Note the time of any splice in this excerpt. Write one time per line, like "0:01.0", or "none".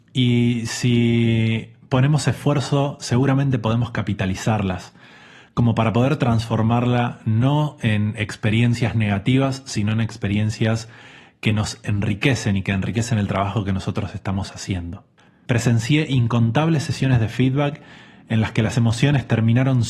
0:15.3